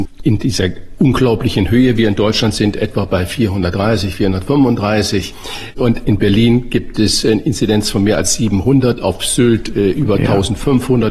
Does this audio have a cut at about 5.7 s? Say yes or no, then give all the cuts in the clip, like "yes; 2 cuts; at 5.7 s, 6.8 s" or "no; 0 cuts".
no; 0 cuts